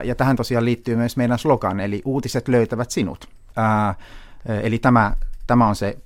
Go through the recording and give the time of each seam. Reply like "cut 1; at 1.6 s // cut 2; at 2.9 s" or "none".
cut 1; at 3.5 s